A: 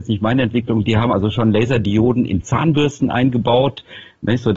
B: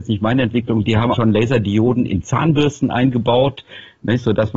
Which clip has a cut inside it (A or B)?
B